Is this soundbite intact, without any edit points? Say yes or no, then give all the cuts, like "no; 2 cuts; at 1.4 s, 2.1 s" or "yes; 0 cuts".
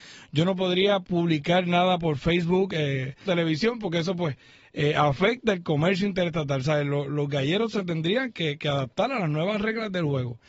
no; 1 cut; at 3.3 s